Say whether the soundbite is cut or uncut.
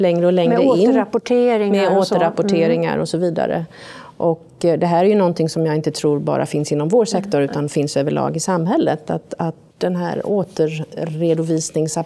cut